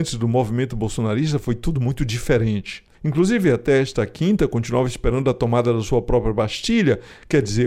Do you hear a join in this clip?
no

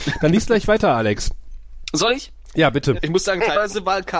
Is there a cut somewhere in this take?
yes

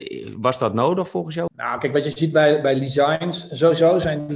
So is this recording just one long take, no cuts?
no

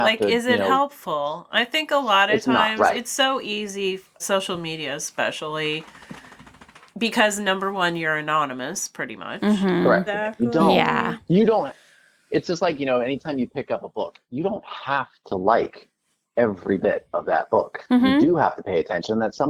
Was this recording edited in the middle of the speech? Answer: yes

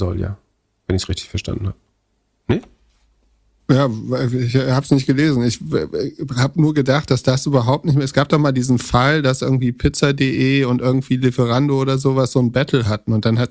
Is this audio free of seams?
yes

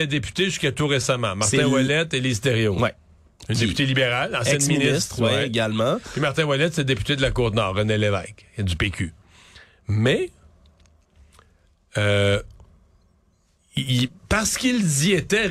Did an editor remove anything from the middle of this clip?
no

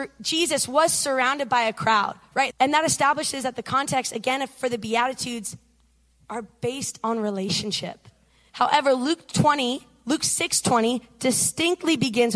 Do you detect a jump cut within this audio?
yes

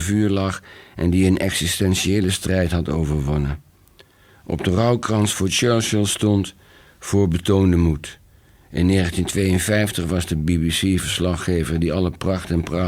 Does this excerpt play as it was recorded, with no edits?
yes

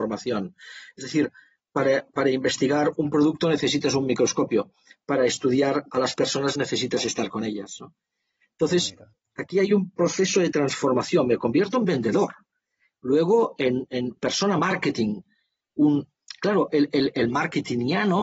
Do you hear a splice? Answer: no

